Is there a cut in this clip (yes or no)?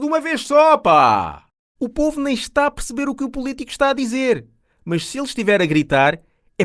yes